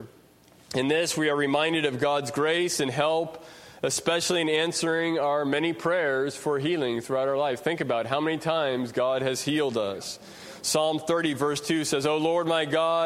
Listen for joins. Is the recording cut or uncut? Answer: uncut